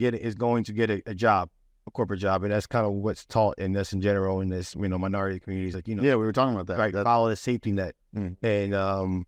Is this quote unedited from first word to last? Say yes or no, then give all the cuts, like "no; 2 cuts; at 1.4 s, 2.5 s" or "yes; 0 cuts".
yes; 0 cuts